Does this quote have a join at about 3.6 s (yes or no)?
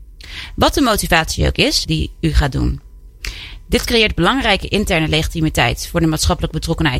no